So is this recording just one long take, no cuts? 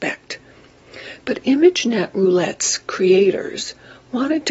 no; 1 cut; at 1.2 s

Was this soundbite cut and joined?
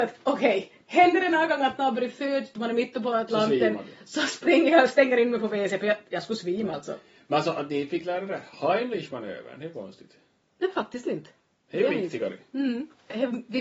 no; 0 cuts

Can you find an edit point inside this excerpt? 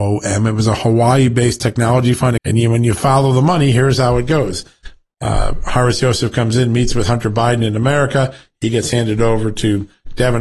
yes; 1 cut; at 2.4 s

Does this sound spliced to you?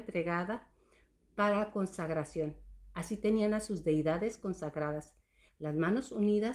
yes; 1 cut; at 5.5 s

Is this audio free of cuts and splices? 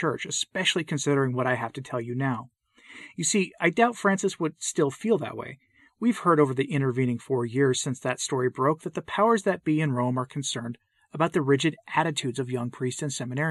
yes; 0 cuts

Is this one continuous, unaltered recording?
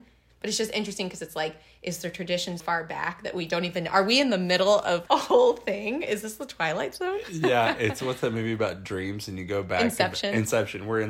no; 2 cuts; at 2.6 s, 5.1 s

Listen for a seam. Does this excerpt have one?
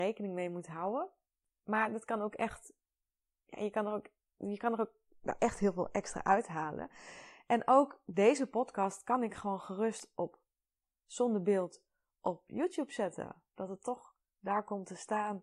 no; 0 cuts

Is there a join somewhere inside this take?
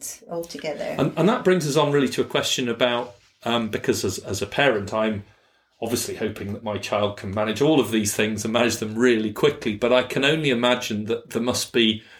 no; 0 cuts

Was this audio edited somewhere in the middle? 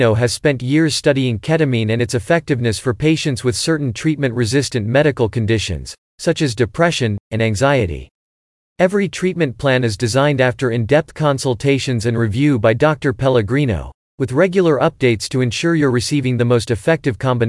yes; 1 cut; at 7.3 s

